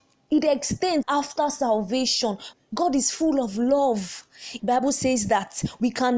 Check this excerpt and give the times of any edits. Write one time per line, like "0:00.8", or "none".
0:01.0
0:02.5
0:04.6